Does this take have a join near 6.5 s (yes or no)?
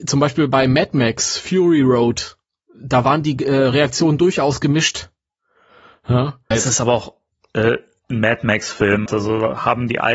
yes